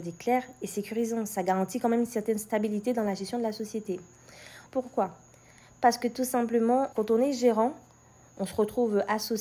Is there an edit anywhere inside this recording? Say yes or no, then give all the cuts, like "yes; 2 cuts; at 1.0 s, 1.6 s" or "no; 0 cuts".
yes; 2 cuts; at 4.7 s, 6.9 s